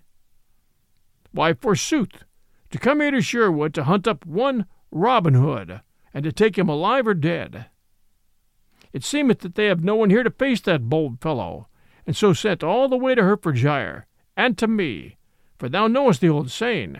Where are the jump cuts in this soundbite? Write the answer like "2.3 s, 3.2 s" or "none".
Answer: 6.0 s